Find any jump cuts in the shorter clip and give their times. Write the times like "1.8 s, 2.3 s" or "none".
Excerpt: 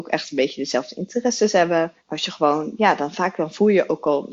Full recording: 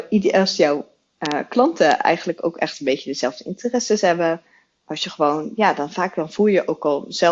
2.0 s